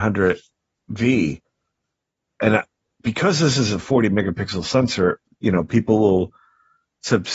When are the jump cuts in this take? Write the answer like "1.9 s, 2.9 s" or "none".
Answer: 5.3 s